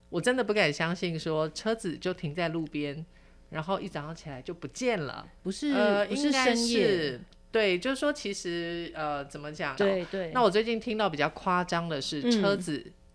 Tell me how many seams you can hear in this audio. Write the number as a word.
two